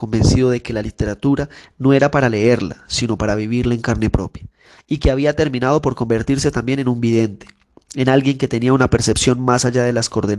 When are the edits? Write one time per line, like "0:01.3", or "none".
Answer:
none